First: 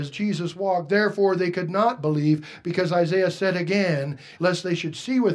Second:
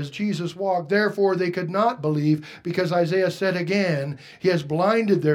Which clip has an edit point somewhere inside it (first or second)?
first